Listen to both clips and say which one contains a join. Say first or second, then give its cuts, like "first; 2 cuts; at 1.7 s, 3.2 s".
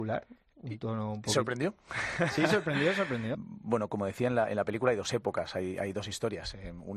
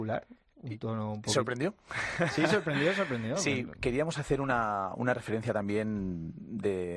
first; 1 cut; at 3.3 s